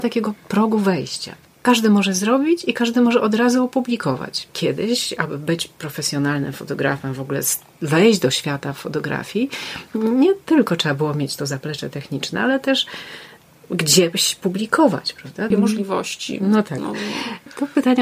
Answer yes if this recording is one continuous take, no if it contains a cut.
no